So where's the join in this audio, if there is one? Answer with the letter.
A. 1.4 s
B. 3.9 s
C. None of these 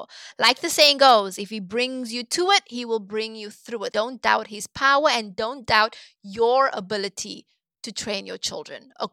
B